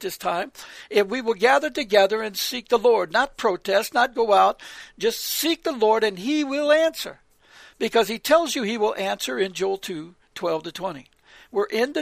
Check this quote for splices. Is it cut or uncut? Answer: uncut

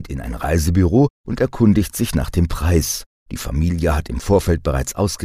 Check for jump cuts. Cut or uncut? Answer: uncut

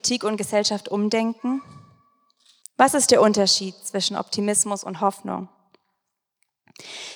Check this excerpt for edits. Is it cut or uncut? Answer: cut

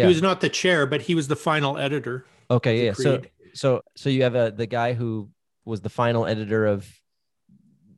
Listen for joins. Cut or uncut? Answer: cut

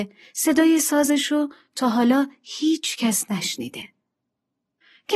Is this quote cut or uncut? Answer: uncut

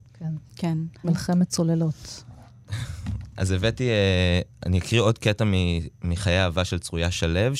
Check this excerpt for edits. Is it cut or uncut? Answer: cut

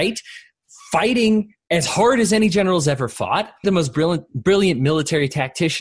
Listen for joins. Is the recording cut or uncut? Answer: cut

